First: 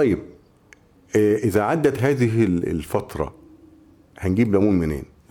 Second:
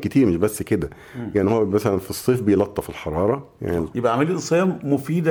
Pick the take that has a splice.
second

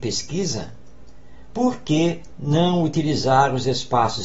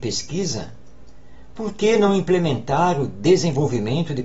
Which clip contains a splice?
first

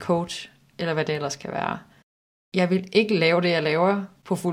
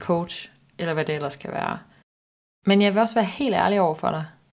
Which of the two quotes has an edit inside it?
second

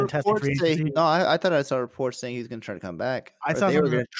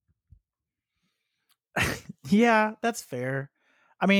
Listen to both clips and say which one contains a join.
first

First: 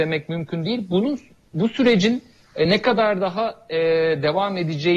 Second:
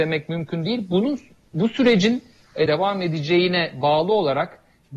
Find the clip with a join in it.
second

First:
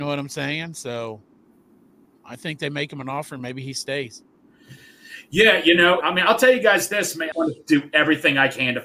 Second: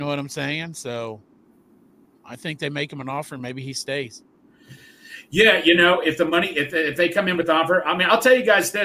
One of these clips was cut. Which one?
first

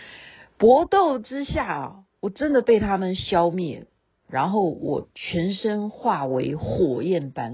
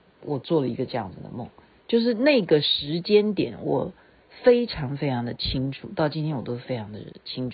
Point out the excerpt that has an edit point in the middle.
second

